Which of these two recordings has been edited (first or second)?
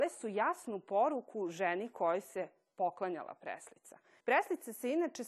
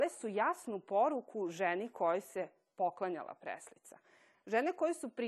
first